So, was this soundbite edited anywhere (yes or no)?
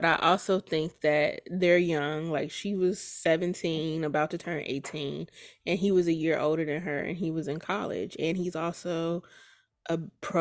no